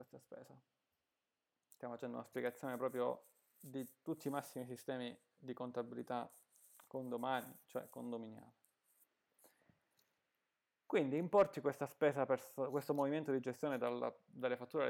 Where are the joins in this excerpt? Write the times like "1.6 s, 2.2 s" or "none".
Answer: none